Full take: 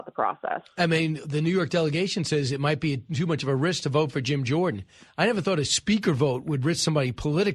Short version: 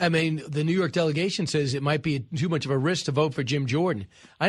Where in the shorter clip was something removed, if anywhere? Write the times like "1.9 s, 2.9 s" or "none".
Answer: none